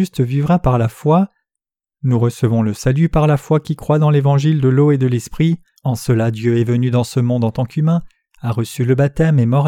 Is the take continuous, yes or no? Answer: no